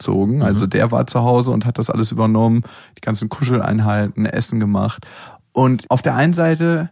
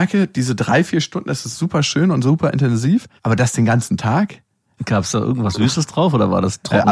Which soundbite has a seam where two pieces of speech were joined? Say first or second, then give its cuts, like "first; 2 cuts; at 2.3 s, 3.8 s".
second; 2 cuts; at 3.2 s, 4.8 s